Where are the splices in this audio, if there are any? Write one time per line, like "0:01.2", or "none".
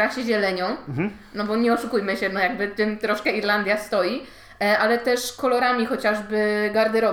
none

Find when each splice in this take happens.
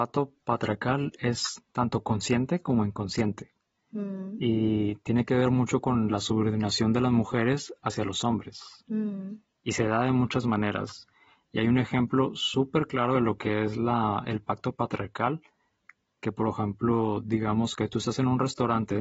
none

